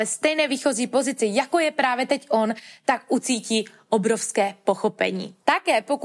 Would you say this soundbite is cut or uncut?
uncut